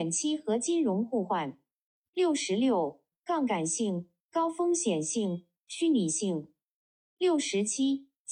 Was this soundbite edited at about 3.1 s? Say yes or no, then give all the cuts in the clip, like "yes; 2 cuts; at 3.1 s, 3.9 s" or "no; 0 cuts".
yes; 1 cut; at 3.1 s